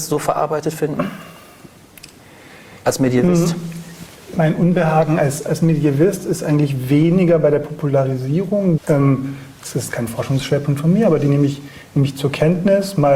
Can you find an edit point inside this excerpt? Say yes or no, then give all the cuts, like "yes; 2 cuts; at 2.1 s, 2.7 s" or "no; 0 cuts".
yes; 1 cut; at 8.8 s